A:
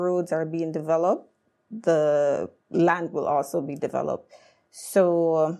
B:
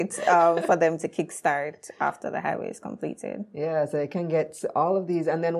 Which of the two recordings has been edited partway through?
A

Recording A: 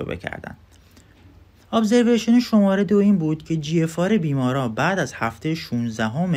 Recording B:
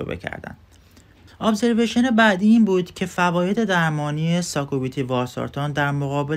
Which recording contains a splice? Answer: B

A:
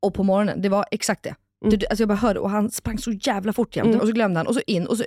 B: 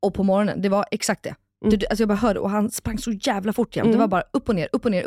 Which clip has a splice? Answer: A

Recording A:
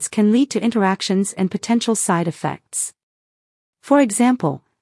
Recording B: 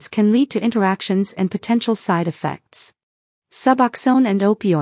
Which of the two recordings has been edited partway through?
B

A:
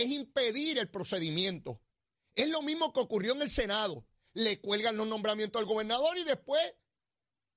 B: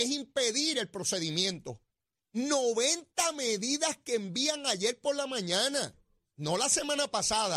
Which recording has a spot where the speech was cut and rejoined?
B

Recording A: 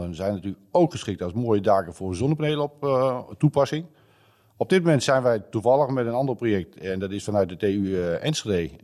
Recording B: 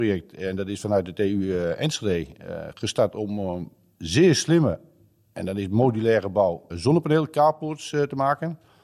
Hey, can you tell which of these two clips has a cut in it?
B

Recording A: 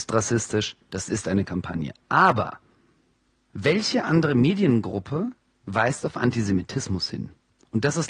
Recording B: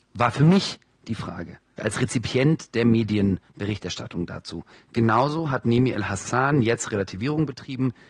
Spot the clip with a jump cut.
B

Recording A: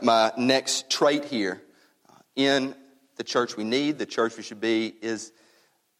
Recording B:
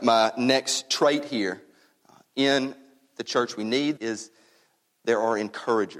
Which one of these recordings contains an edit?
B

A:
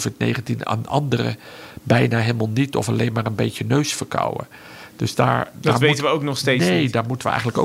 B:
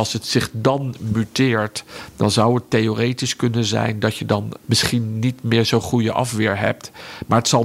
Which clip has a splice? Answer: B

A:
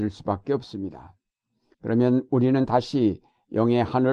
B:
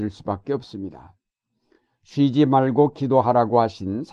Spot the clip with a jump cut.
A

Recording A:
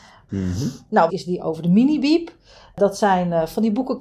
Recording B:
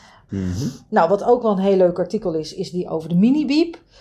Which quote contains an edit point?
A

